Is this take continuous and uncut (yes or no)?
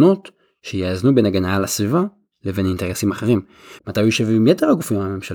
no